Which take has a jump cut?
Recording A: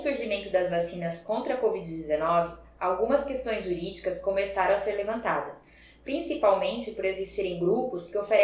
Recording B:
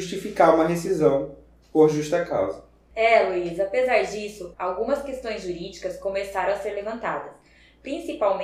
B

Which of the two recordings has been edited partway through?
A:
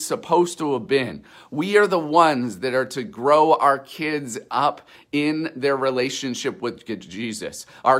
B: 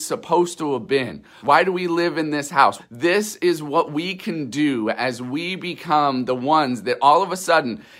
B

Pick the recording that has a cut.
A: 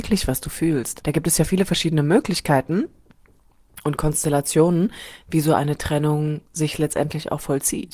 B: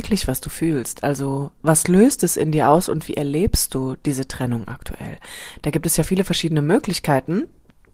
A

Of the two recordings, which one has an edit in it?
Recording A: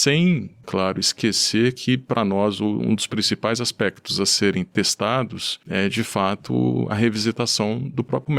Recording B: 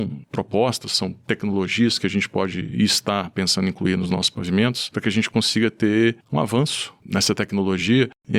B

